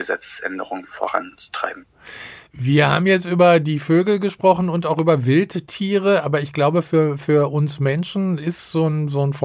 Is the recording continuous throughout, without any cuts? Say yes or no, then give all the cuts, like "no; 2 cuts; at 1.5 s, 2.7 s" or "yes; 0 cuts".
yes; 0 cuts